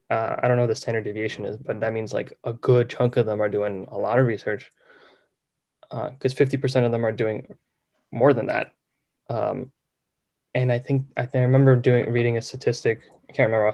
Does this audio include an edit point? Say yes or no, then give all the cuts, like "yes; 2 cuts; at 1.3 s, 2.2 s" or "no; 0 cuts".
no; 0 cuts